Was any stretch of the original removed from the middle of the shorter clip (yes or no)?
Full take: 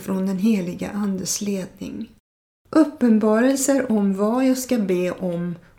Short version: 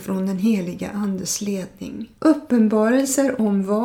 yes